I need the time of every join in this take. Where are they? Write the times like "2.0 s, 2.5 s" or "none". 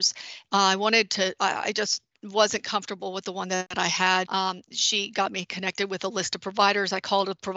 4.2 s